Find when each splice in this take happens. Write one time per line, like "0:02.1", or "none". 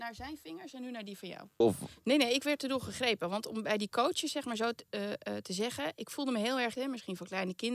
0:01.6
0:06.7